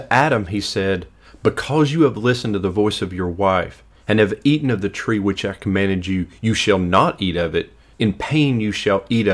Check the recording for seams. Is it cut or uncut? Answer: cut